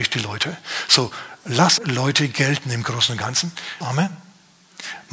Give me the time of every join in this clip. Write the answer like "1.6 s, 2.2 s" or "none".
1.8 s, 3.8 s